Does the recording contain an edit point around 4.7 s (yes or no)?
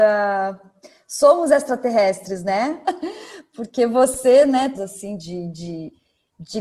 yes